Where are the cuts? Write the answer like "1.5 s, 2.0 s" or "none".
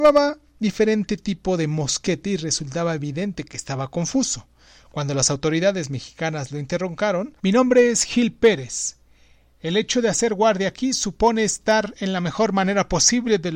7.4 s